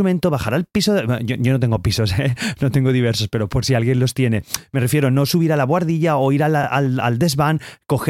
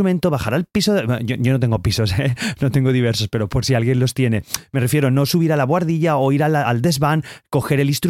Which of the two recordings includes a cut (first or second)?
second